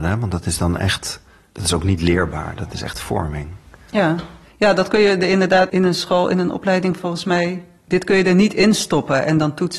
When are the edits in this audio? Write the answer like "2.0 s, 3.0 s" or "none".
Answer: 5.7 s